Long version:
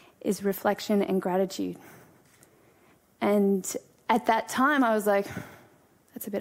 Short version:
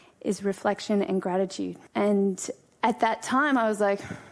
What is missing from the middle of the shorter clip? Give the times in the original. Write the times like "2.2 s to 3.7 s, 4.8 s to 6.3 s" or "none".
1.9 s to 3.1 s

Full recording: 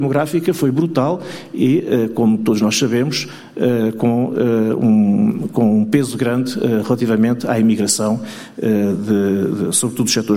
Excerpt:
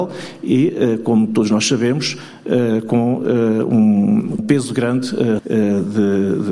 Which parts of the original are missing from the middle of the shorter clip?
5.5 s to 5.8 s, 6.8 s to 8.5 s

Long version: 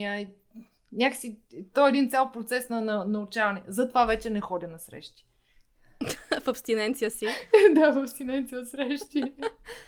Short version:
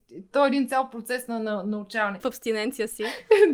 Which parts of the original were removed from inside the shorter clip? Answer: 3.6 s to 6.4 s

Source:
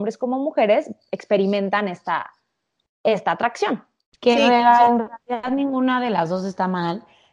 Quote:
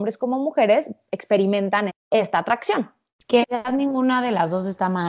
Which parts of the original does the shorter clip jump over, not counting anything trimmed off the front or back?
1.9 s to 2.8 s, 4.4 s to 5.2 s

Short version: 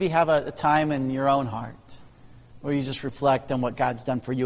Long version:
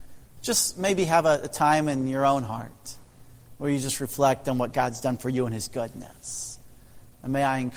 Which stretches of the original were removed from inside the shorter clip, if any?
none

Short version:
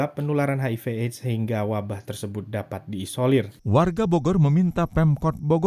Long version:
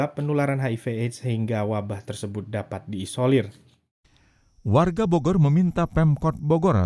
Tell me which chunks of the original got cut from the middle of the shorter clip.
3.6 s to 4.6 s

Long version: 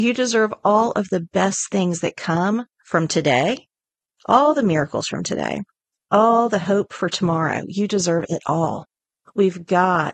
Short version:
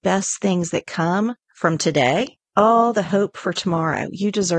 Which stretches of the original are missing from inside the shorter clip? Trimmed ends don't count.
3.8 s to 6.1 s

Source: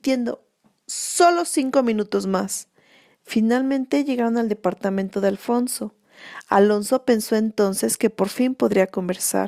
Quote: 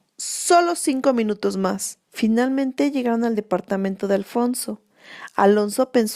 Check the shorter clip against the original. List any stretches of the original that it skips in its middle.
2.7 s to 3.2 s

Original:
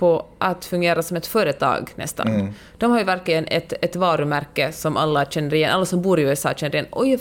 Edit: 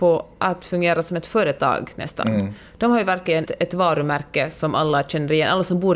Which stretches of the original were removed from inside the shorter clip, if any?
3.5 s to 3.7 s

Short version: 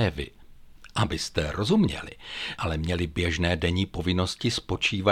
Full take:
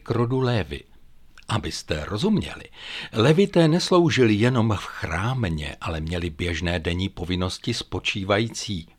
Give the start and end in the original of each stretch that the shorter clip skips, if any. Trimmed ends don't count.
3.1 s to 5.8 s

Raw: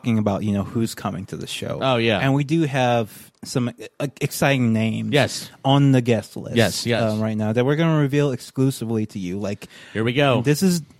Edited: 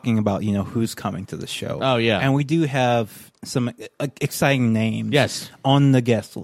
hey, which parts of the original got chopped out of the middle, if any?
none

